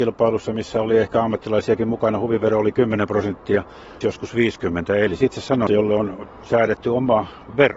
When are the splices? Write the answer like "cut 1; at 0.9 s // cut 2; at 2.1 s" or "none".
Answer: cut 1; at 4.0 s // cut 2; at 5.7 s